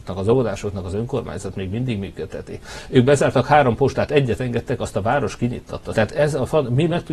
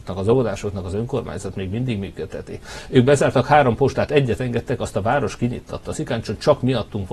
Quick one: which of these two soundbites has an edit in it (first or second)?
first